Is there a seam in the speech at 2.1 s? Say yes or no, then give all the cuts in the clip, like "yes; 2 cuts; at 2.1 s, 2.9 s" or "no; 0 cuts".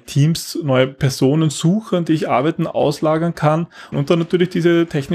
no; 1 cut; at 3.9 s